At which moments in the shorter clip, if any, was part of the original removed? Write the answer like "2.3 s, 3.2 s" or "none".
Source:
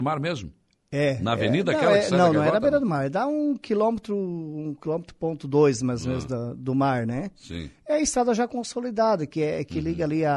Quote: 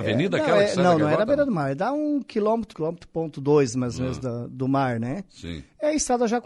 2.7 s